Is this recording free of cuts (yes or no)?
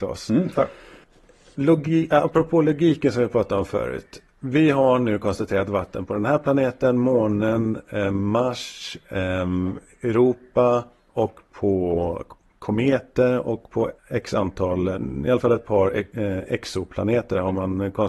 no